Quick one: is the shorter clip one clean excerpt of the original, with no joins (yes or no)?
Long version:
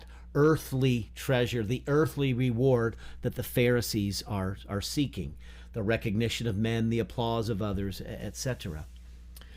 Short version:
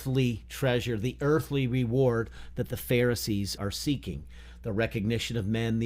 no